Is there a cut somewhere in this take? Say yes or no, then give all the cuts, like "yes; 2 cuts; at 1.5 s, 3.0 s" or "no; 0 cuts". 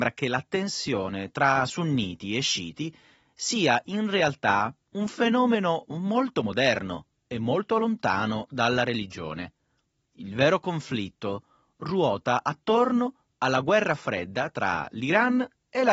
no; 0 cuts